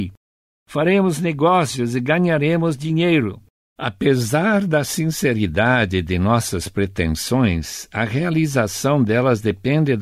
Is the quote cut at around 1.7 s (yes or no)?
no